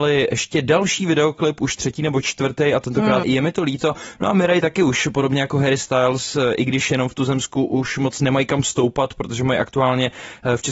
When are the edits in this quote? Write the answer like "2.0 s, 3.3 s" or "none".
3.2 s